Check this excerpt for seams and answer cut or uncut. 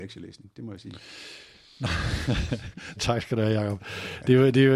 cut